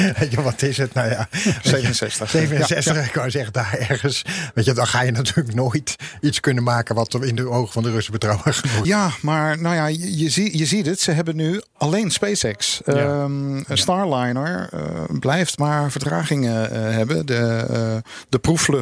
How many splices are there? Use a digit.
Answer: 1